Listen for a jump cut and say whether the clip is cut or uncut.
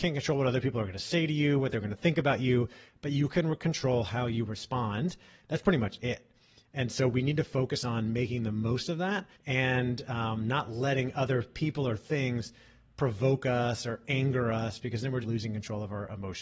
cut